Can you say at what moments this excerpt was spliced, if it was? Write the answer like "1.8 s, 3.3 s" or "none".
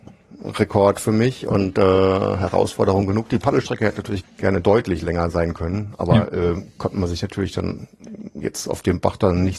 4.2 s